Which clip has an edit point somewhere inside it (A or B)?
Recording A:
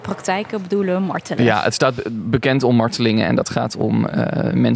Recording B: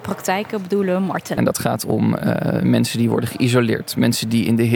B